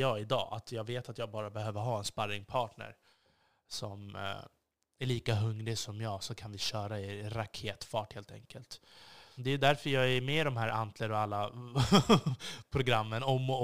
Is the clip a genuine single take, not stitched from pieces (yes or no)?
no